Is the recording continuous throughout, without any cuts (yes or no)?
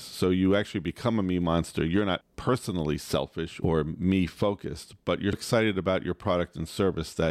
no